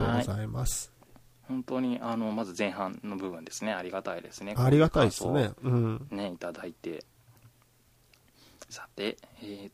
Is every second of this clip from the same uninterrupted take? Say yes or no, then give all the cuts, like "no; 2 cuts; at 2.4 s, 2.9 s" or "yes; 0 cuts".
yes; 0 cuts